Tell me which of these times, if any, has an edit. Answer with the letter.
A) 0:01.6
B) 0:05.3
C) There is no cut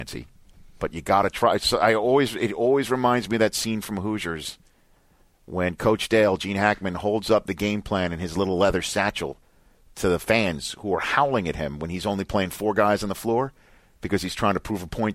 C